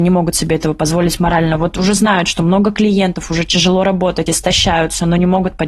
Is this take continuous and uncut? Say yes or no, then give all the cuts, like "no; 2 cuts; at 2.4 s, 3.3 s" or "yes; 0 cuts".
yes; 0 cuts